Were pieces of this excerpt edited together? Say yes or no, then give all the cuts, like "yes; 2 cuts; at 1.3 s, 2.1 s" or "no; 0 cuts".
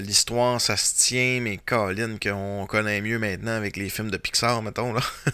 no; 0 cuts